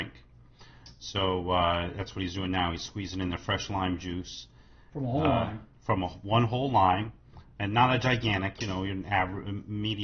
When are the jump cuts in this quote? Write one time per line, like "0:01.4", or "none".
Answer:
none